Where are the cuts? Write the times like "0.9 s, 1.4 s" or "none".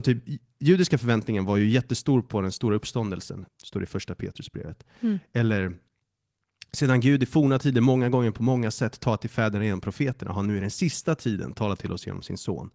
3.5 s